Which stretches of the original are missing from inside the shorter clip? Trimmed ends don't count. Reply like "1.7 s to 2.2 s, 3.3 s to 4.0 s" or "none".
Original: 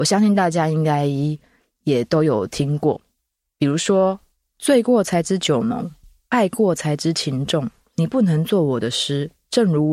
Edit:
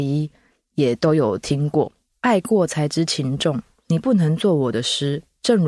3.2 s to 6.2 s